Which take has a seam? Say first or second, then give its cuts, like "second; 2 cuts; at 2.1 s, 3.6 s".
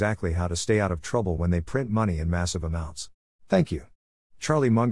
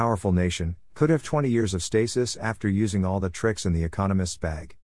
first; 1 cut; at 3.3 s